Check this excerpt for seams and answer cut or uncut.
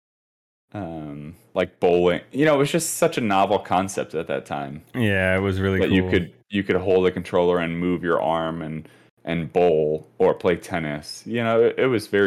uncut